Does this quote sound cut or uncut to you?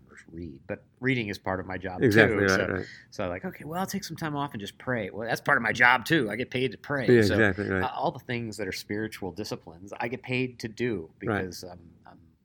uncut